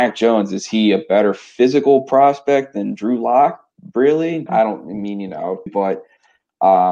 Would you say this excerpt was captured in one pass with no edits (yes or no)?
no